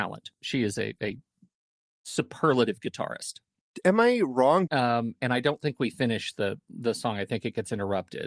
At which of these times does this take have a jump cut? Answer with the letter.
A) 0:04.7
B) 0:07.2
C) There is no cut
A